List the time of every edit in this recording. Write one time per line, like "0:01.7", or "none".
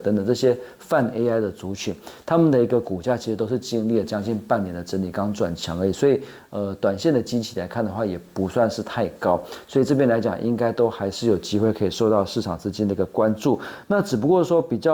none